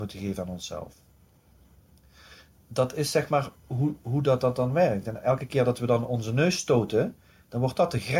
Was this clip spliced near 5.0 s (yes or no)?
no